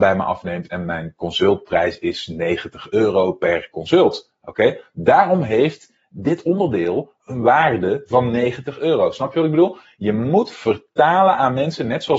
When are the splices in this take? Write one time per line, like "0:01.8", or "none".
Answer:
none